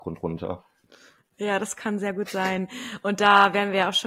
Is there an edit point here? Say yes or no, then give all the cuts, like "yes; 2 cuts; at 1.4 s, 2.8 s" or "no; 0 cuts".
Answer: no; 0 cuts